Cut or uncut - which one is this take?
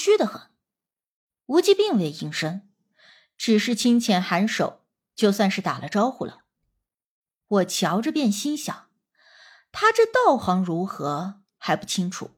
uncut